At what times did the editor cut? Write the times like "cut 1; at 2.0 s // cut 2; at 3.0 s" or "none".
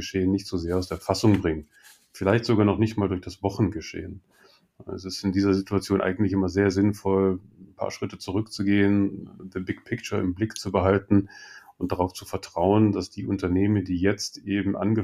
none